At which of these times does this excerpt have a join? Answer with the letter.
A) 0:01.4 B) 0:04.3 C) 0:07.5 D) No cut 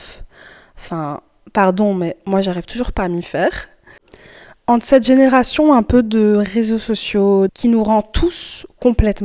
C